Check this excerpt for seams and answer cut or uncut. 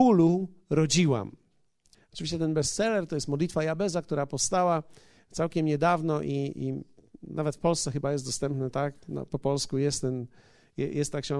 cut